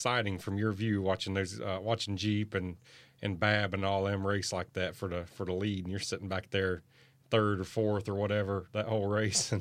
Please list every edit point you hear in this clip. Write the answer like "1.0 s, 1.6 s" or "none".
none